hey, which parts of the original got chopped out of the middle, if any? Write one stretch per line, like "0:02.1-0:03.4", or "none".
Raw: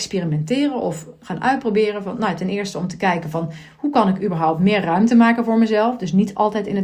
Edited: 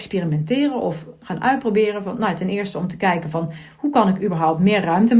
none